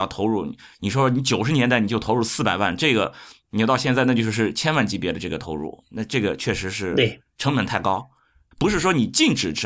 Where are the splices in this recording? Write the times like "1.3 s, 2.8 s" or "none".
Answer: 8.5 s